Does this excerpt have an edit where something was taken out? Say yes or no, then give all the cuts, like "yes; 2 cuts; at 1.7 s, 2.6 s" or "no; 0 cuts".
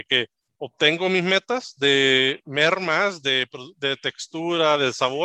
no; 0 cuts